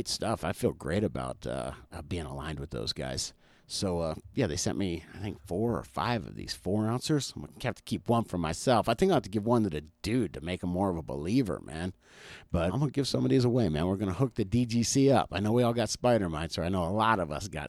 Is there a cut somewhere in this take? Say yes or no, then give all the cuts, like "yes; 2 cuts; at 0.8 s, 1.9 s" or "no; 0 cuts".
yes; 1 cut; at 12.7 s